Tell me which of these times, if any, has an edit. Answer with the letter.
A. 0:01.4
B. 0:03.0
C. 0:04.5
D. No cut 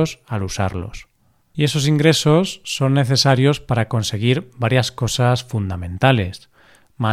A